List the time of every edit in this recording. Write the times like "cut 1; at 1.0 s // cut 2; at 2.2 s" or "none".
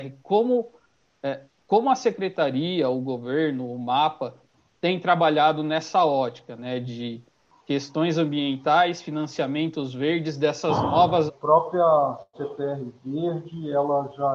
cut 1; at 11.3 s